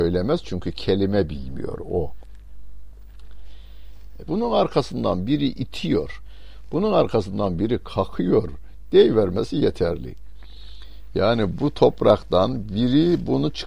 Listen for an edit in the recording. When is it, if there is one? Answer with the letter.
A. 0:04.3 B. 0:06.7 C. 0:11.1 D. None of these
A